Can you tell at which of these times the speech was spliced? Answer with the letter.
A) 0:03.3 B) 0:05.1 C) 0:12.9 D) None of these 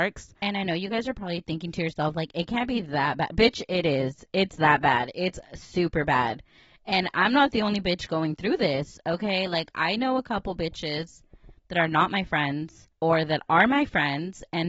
C